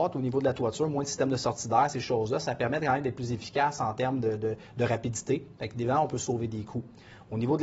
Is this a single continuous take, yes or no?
yes